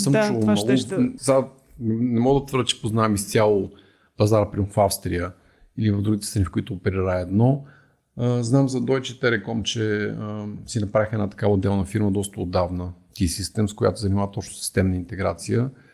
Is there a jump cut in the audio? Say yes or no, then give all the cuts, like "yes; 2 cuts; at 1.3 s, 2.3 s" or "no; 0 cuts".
yes; 1 cut; at 1.2 s